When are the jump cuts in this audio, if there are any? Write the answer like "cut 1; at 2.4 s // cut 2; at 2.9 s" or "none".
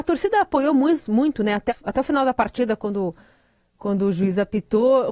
cut 1; at 1.7 s